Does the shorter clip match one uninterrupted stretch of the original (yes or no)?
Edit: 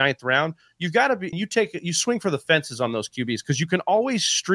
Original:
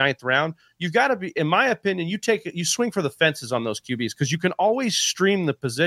no